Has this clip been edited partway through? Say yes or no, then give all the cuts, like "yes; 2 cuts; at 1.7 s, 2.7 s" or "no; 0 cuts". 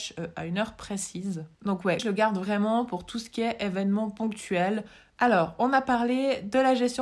yes; 2 cuts; at 2.0 s, 5.1 s